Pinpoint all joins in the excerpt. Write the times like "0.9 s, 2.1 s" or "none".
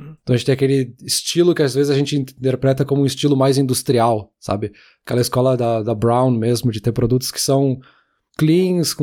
none